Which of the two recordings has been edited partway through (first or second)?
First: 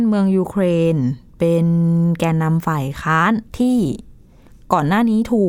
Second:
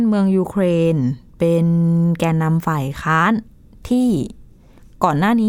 first